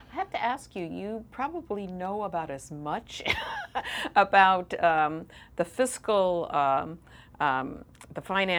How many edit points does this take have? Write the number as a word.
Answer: zero